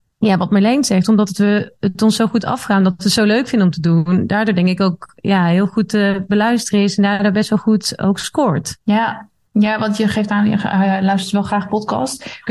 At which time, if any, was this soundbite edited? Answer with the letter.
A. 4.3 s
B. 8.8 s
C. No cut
B